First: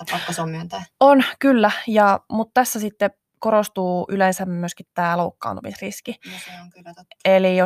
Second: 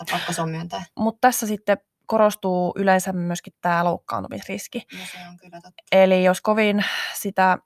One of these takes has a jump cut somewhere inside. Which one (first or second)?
second